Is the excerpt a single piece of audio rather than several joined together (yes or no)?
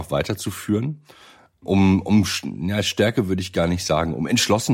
yes